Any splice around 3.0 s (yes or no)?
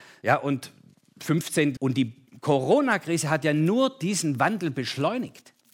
no